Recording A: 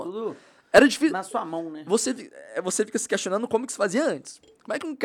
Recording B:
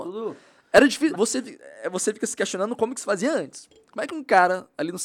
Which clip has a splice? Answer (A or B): B